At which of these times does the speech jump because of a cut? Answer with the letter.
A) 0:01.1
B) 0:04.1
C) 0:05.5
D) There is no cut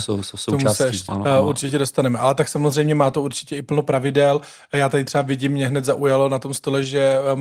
A